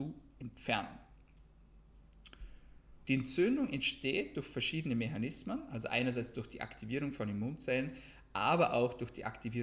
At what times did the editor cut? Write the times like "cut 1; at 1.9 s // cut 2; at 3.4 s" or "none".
cut 1; at 3.1 s